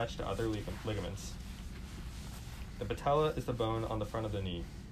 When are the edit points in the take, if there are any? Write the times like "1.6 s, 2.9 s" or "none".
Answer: none